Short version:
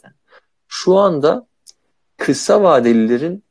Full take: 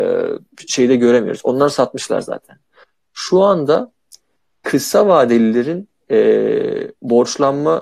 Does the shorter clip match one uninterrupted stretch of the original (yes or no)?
yes